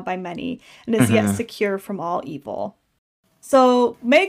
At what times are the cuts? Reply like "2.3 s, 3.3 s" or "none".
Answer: none